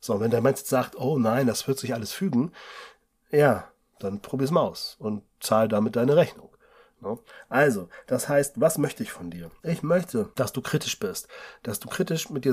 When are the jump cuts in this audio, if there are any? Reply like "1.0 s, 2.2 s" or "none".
none